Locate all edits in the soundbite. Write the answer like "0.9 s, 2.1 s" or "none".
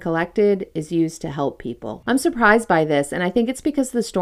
2.0 s